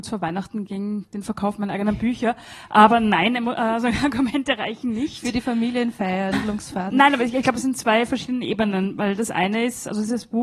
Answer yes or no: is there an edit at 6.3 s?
yes